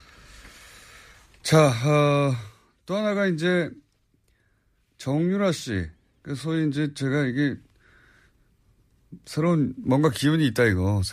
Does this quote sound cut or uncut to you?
uncut